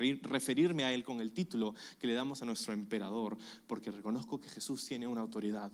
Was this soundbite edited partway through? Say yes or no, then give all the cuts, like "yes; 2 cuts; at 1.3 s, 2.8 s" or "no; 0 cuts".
no; 0 cuts